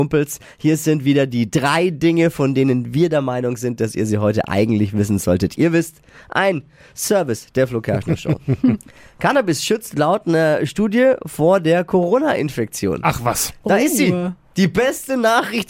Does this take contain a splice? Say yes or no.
no